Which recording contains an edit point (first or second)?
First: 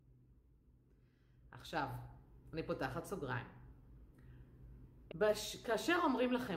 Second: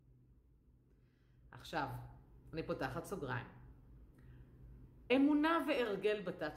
first